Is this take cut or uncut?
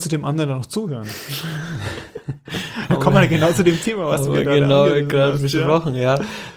uncut